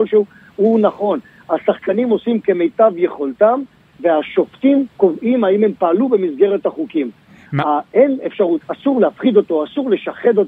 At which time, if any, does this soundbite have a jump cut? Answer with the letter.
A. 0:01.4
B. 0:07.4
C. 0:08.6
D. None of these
C